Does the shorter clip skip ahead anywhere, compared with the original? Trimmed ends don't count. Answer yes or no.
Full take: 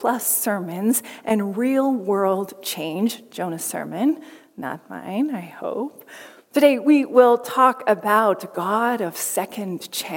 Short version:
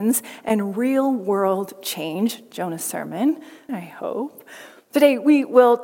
yes